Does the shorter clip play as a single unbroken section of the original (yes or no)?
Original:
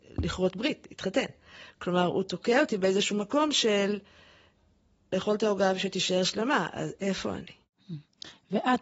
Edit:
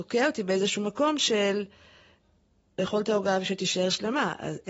yes